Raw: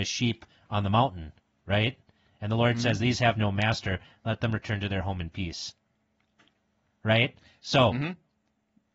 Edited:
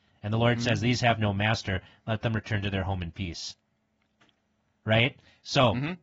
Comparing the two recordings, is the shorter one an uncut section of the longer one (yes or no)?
yes